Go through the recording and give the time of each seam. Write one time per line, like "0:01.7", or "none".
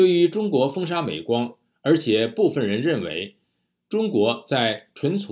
0:01.7